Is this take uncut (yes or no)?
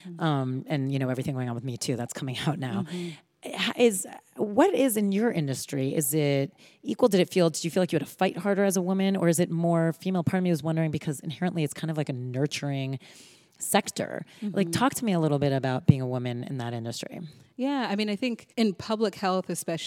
no